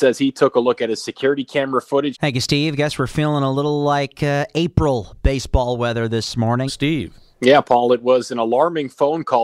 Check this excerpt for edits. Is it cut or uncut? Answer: cut